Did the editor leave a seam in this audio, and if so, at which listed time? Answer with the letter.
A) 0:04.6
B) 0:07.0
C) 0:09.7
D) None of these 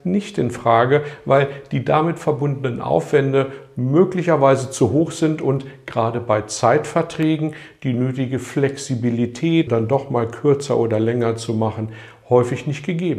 C